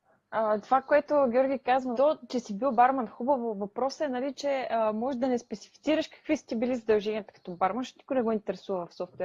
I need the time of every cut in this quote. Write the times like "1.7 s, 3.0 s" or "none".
1.9 s